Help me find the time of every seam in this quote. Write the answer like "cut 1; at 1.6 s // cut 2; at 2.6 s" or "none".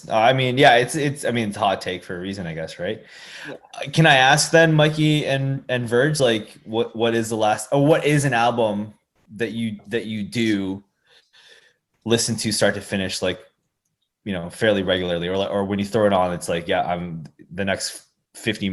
none